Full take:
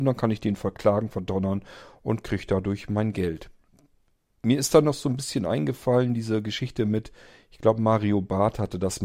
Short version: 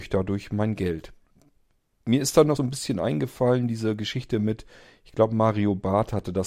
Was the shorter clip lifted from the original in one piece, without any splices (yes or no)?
no